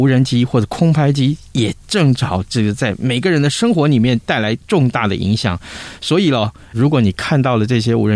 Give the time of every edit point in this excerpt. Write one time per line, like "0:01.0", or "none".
0:06.7